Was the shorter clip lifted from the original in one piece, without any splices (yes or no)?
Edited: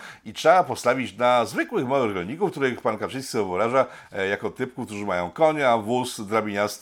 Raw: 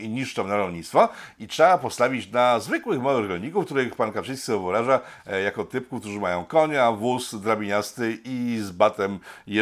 yes